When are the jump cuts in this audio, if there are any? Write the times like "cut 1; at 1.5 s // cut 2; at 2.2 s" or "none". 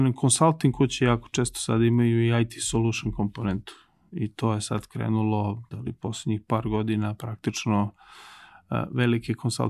cut 1; at 5.7 s